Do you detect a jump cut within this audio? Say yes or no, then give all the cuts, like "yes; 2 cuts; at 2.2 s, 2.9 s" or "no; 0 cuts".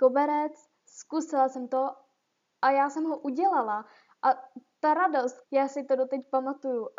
yes; 1 cut; at 5.4 s